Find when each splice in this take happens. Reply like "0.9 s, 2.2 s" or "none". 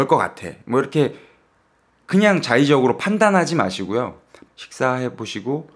4.5 s